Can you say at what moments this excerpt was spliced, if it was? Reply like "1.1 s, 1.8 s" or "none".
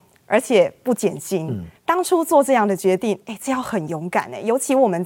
1.8 s